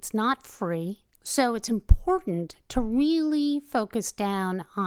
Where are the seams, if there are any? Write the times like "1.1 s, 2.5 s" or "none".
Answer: 1.1 s